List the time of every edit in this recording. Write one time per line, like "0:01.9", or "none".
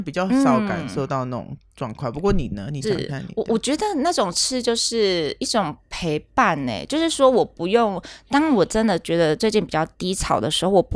0:02.8